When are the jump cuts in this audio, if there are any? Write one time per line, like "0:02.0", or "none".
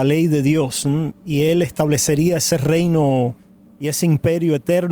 0:01.1